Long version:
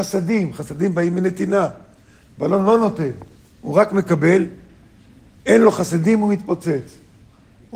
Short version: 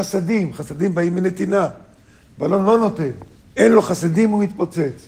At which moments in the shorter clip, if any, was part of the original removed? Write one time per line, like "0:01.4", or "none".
0:03.4